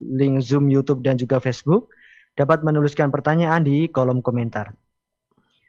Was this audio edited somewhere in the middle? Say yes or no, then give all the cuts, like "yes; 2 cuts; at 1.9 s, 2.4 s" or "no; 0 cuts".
no; 0 cuts